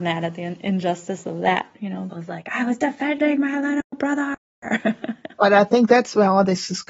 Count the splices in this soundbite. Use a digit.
1